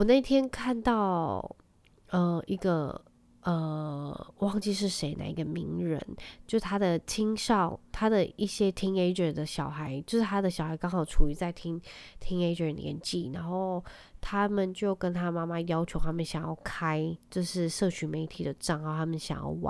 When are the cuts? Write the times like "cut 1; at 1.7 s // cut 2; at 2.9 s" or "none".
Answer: none